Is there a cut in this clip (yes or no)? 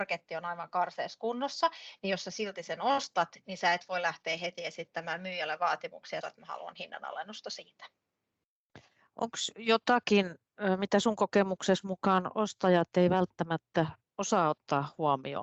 yes